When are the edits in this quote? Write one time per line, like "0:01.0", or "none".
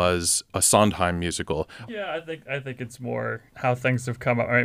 0:01.9
0:03.5